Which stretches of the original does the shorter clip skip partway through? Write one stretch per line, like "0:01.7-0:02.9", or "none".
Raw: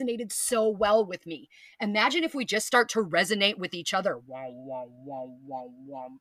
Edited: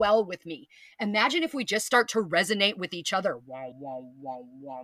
0:04.5-0:05.0